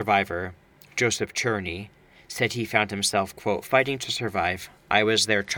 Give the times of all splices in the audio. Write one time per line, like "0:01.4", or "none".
none